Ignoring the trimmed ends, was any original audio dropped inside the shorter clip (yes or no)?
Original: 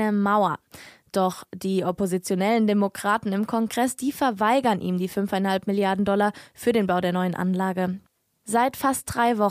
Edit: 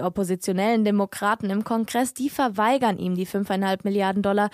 no